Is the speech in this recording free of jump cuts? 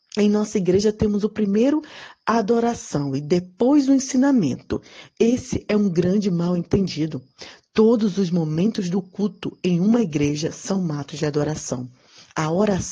yes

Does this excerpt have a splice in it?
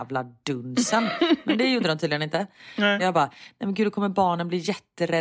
yes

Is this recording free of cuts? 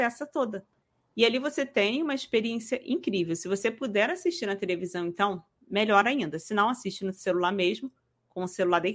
yes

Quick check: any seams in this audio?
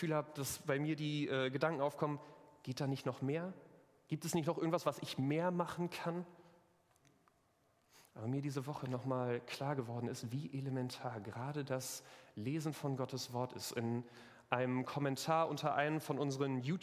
no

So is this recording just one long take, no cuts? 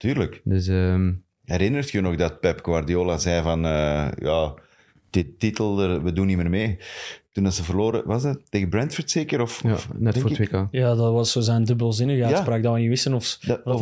yes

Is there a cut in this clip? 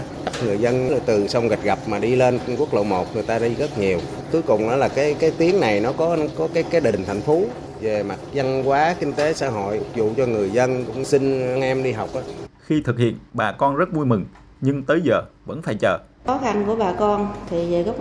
yes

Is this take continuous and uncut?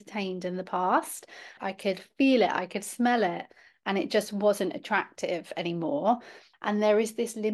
no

